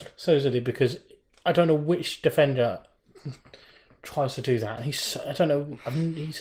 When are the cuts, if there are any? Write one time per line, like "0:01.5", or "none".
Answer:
none